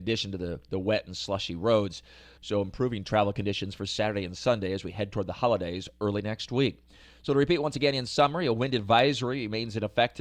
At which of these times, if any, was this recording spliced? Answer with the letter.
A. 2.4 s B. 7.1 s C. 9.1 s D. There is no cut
A